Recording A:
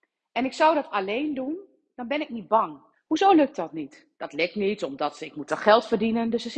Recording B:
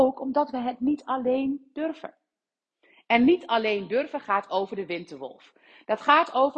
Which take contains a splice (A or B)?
A